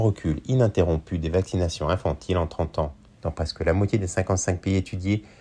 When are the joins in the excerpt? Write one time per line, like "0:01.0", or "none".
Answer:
0:03.2